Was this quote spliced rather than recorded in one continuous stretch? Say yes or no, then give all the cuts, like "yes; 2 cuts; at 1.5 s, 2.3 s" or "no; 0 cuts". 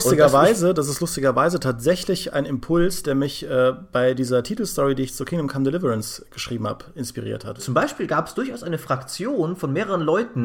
yes; 1 cut; at 7.6 s